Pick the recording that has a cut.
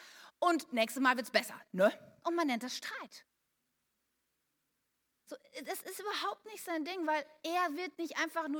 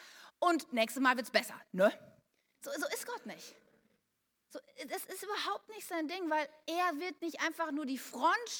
first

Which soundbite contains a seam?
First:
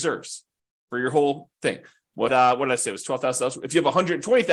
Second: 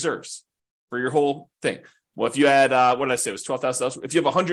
first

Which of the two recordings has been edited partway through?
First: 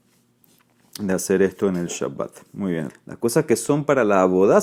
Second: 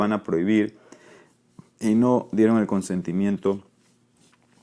first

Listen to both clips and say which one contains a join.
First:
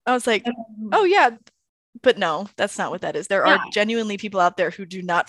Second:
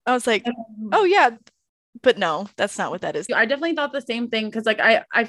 second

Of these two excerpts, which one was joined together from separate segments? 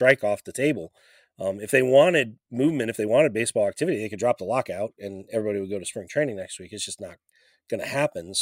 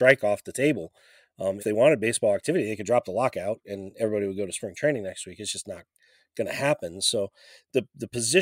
second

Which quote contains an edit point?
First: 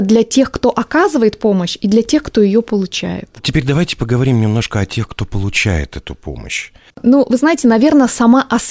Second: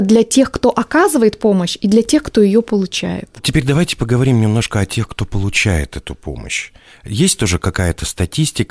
first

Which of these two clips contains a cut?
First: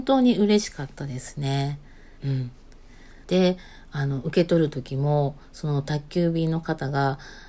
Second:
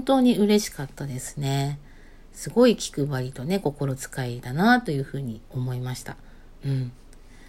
first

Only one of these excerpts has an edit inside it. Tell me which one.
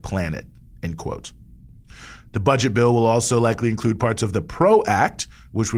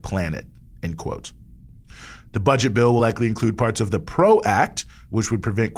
second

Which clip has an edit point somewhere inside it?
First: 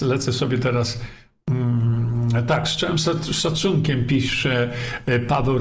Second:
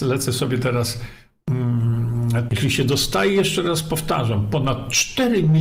second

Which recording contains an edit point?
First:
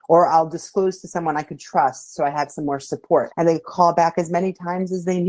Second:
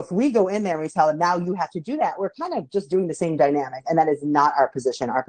first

